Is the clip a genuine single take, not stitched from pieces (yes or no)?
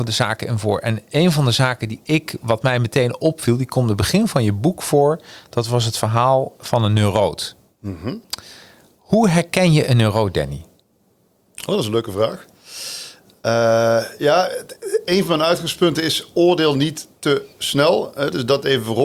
yes